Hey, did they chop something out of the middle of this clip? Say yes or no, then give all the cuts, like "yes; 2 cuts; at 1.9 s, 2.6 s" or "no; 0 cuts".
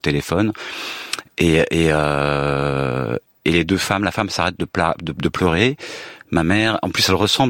no; 0 cuts